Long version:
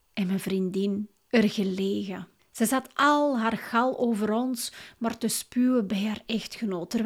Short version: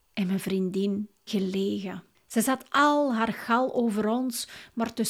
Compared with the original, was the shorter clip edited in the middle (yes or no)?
yes